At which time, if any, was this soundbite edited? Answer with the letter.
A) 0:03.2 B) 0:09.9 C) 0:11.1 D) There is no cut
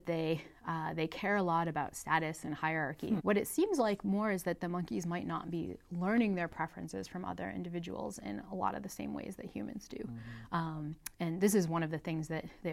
A